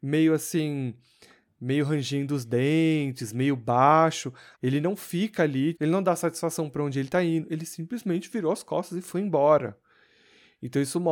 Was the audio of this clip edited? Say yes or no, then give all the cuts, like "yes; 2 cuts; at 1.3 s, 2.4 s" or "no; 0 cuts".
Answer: yes; 2 cuts; at 4.5 s, 5.7 s